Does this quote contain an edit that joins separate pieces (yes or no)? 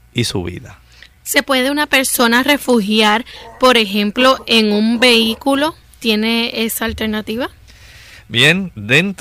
no